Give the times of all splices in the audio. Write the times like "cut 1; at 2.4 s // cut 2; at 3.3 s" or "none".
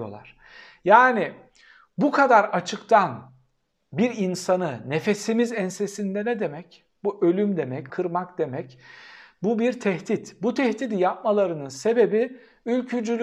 cut 1; at 7.9 s